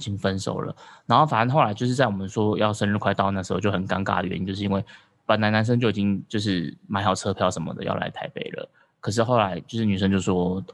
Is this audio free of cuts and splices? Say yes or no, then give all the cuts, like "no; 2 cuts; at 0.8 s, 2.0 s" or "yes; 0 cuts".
yes; 0 cuts